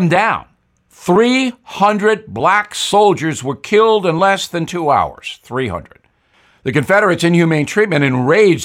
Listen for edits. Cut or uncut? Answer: uncut